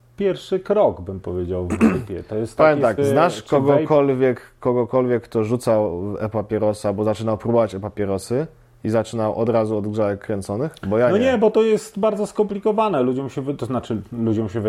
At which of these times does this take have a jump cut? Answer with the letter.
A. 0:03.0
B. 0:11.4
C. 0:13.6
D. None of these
A